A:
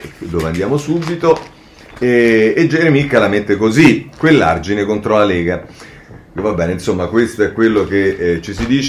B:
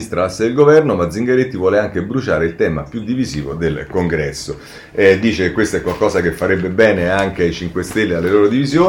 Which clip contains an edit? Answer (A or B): A